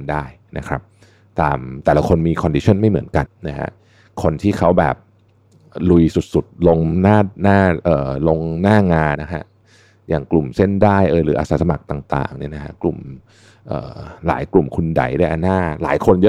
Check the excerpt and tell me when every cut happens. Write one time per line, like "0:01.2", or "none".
0:03.3
0:09.2